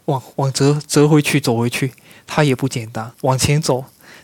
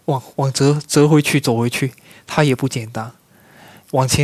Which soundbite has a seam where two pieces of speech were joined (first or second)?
first